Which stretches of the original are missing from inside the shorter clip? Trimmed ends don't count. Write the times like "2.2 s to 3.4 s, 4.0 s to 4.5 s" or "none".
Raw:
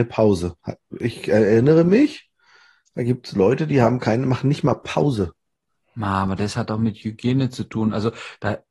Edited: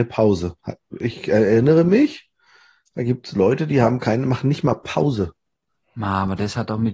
none